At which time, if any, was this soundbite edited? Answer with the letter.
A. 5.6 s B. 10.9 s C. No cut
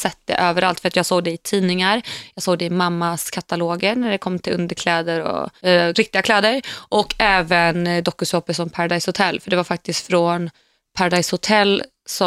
A